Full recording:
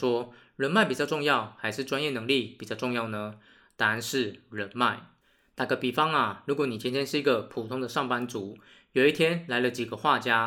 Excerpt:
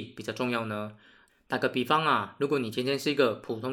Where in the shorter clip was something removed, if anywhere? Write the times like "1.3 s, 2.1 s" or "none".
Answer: 1.3 s